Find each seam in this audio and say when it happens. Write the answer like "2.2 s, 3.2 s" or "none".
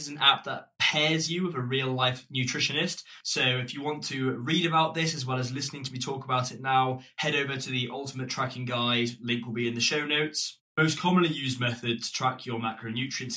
3.2 s